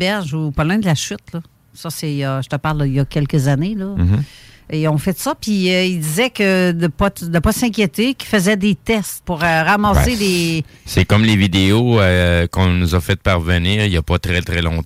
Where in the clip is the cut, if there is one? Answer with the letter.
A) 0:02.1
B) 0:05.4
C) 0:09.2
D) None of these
C